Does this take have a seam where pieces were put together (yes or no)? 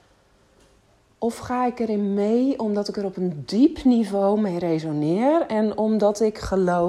no